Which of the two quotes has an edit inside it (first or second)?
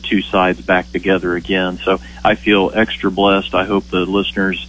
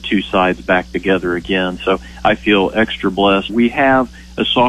second